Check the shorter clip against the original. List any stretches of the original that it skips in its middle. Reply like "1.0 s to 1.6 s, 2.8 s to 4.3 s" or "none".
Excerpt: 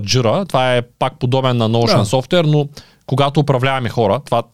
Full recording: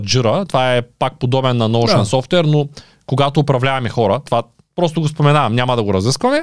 none